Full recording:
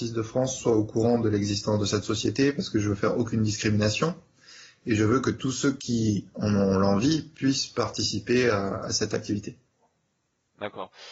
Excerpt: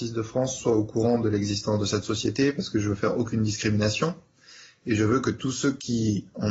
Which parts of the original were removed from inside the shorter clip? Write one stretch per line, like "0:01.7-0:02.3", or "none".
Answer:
none